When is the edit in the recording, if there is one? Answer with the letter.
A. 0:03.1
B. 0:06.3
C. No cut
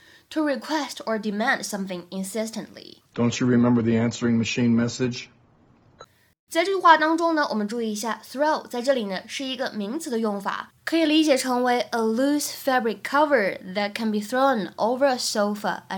A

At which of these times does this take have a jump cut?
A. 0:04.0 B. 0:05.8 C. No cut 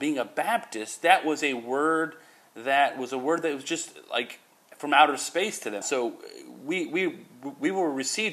B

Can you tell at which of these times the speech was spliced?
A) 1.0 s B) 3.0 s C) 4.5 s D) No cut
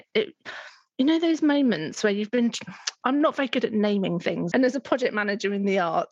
C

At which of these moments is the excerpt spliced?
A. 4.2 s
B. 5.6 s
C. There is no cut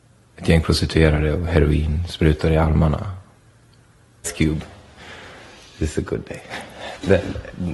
A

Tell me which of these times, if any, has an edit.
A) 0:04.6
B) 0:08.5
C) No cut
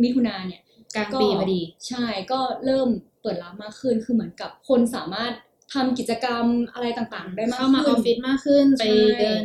A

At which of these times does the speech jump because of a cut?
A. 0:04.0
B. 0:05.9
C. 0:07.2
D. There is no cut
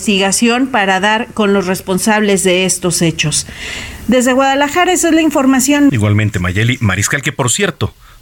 B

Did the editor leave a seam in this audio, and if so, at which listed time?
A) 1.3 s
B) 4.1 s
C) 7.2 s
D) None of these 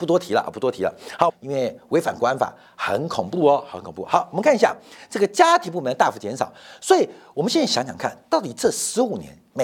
A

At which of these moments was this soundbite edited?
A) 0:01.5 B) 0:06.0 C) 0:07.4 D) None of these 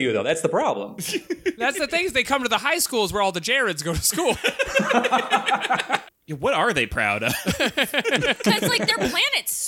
B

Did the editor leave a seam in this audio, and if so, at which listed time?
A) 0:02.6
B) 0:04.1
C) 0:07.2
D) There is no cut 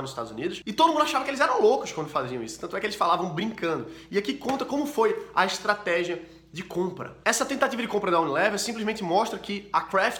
C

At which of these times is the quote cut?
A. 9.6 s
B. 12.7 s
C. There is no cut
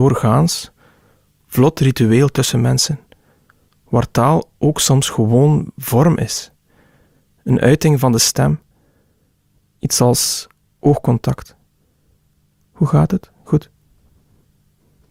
C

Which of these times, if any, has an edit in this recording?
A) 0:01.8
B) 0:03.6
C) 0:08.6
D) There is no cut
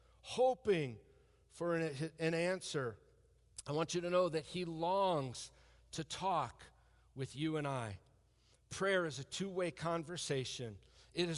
D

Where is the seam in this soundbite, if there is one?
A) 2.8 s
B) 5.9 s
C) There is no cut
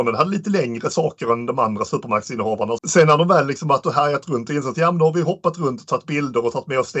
A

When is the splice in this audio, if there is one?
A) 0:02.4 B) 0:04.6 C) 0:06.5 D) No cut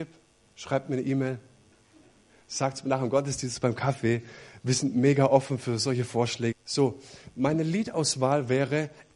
C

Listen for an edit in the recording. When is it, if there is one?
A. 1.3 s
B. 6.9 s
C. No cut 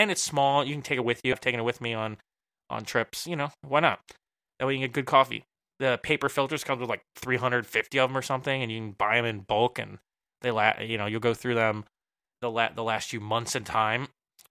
A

